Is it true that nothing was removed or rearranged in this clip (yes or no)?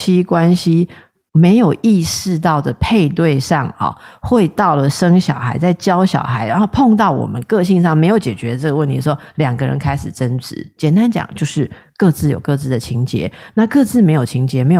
yes